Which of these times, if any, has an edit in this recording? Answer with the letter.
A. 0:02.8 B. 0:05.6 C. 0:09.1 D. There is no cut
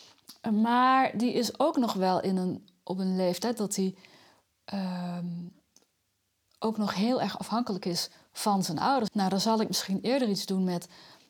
C